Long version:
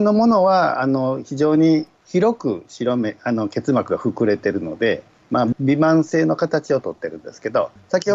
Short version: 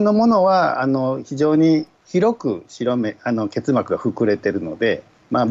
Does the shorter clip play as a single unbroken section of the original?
yes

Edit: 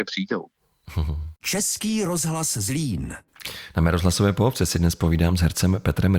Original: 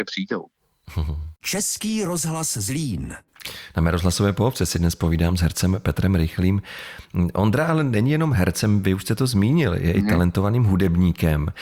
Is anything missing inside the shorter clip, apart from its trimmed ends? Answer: no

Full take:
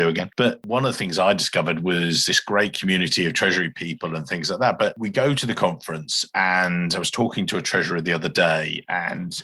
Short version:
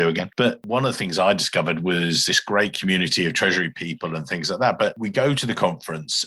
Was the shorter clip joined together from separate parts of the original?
no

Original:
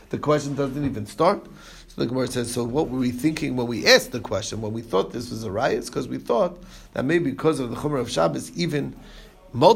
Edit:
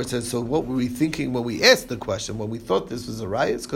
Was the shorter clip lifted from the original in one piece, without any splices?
yes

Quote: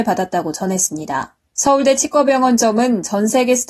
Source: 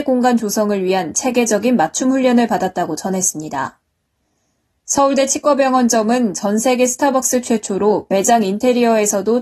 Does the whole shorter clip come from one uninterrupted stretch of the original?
no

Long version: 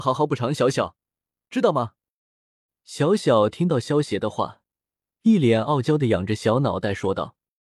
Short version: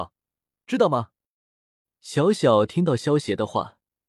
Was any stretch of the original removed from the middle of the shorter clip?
no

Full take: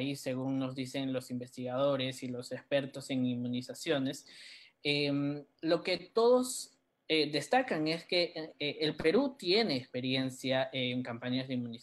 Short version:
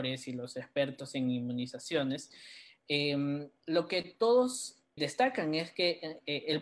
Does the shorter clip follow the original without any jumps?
no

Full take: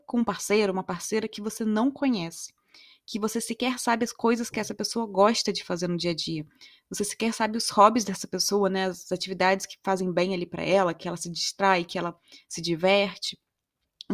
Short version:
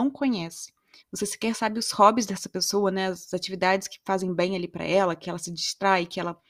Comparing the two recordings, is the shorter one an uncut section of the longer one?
no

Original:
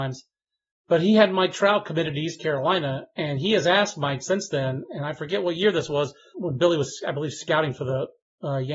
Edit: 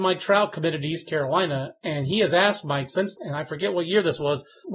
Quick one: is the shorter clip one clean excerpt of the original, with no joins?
no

